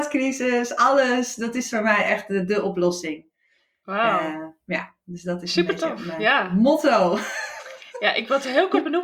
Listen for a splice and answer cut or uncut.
uncut